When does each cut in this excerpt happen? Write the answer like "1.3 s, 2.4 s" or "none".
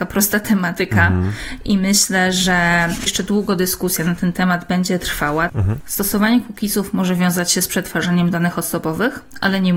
5.5 s